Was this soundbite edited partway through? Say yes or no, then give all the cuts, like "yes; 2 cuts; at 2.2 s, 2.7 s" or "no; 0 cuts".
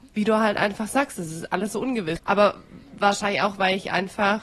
yes; 1 cut; at 2.2 s